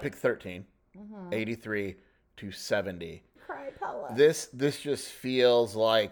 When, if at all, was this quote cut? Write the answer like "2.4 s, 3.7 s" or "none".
3.3 s